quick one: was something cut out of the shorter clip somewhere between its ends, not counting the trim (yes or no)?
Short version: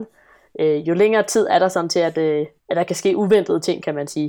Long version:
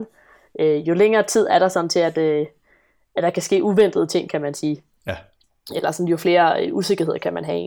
yes